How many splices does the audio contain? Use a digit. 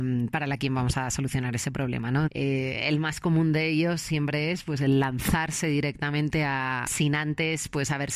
2